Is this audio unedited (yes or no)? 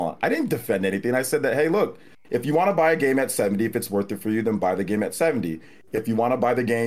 yes